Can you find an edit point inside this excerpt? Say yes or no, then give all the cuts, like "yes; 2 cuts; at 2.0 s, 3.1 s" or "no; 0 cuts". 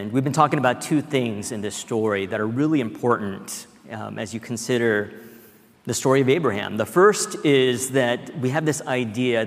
no; 0 cuts